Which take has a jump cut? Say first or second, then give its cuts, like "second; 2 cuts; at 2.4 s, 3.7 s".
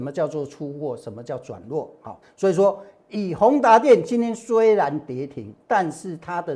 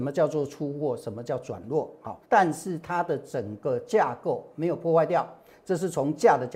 second; 1 cut; at 2.2 s